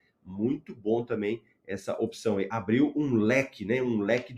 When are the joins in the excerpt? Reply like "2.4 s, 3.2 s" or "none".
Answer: none

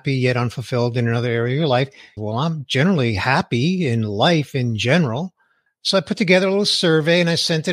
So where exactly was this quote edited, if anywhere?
2.2 s, 5.7 s

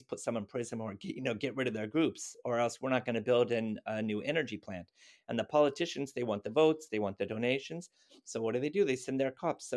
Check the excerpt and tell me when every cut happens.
none

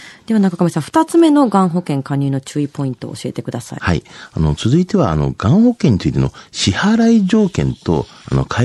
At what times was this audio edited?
none

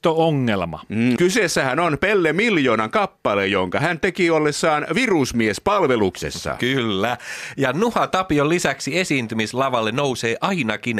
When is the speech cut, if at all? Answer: 1.2 s

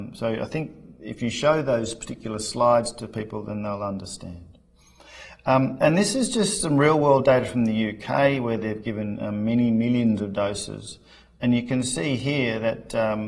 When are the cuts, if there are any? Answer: none

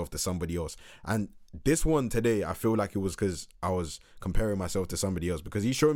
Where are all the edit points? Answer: none

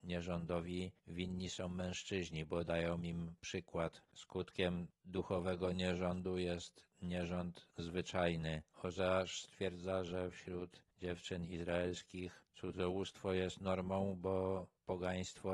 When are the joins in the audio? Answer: 4.1 s

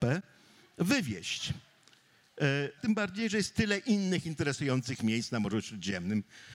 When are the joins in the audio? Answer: 2.8 s

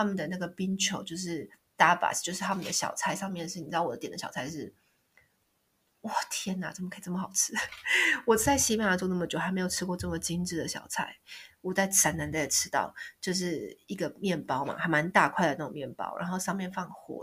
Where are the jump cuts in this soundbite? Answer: none

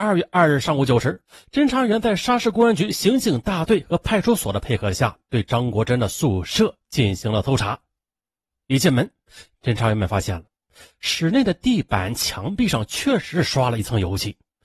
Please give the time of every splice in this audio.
none

